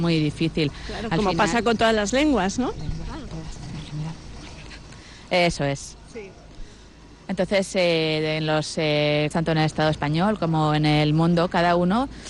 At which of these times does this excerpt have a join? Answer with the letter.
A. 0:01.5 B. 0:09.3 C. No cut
B